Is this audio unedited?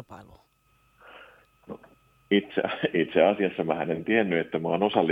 yes; 0 cuts

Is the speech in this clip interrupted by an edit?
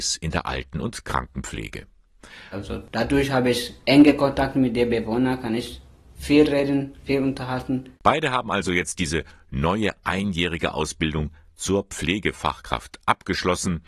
yes; 1 cut; at 2.5 s

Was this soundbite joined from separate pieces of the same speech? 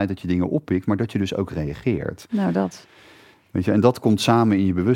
no; 0 cuts

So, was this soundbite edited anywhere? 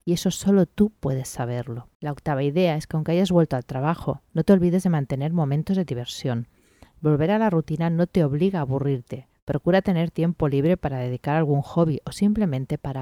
yes; 1 cut; at 1.9 s

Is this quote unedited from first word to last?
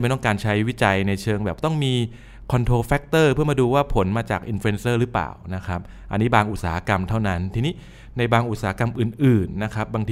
yes; 0 cuts

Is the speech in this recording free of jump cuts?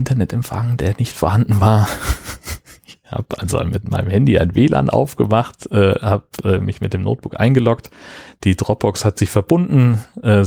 yes; 0 cuts

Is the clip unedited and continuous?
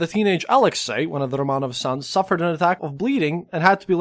no; 1 cut; at 2.8 s

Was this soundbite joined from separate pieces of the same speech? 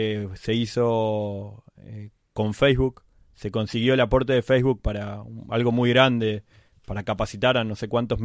no; 0 cuts

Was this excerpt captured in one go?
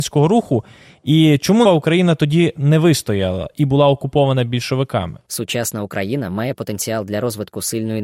no; 2 cuts; at 1.6 s, 5.3 s

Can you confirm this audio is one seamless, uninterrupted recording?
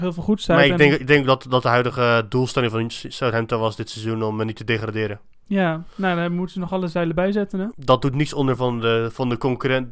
no; 1 cut; at 7.7 s

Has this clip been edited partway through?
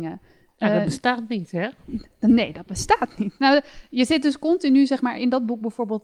no; 0 cuts

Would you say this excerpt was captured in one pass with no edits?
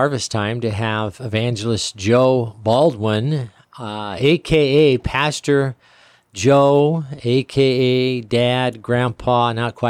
yes; 0 cuts

